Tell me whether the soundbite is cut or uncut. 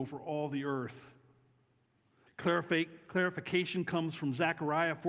cut